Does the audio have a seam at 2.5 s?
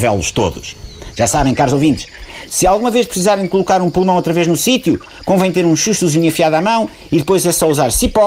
no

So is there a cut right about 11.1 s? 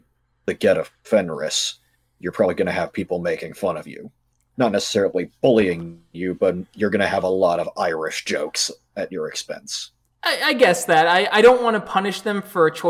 no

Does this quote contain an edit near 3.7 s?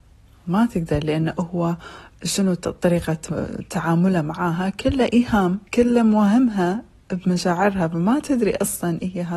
no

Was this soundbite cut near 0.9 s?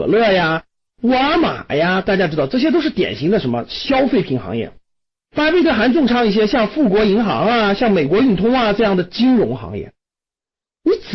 yes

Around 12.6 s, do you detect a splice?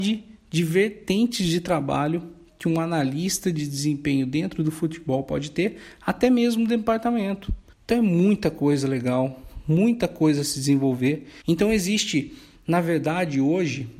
no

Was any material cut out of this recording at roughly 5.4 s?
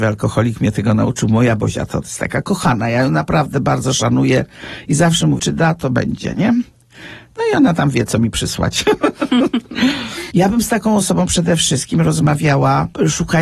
yes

